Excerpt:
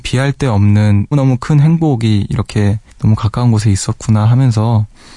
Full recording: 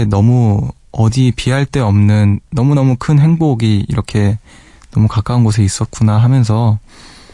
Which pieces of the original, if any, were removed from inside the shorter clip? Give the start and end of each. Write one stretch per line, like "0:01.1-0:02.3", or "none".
0:02.4-0:02.7
0:04.5-0:04.8